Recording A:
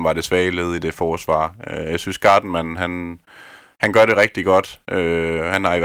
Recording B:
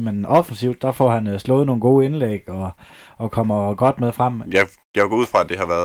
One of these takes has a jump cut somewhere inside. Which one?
B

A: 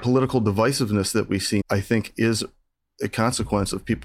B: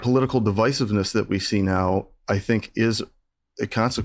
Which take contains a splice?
A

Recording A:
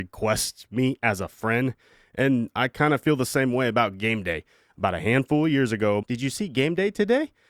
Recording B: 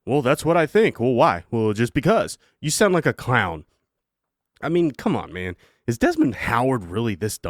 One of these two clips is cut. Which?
A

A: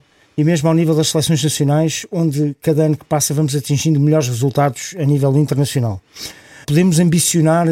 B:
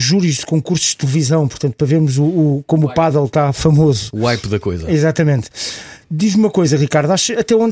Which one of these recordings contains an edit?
A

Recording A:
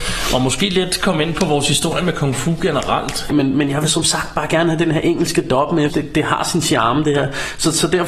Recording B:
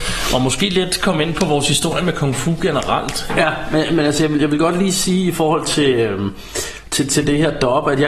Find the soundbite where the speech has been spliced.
A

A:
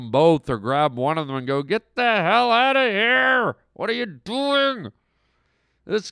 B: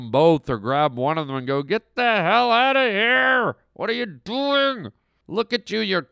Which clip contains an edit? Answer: B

